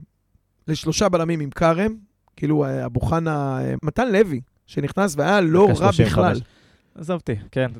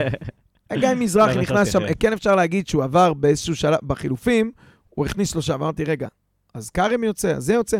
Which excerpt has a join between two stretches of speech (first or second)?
first